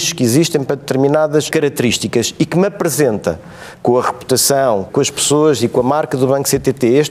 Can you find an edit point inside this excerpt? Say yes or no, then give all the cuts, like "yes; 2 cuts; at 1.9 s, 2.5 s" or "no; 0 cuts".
yes; 2 cuts; at 1.5 s, 4.9 s